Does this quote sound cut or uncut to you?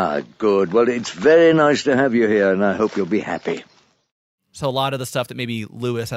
uncut